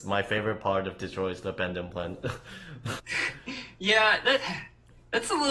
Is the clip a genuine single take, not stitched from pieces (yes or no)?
no